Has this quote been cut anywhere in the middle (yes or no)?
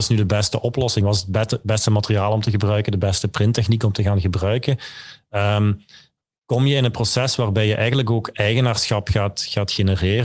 no